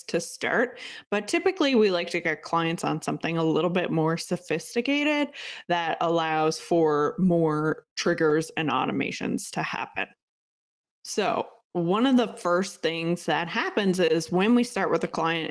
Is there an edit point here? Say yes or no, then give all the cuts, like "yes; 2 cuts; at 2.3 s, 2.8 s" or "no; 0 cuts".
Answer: no; 0 cuts